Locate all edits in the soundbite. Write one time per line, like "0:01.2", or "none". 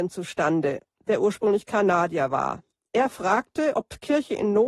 none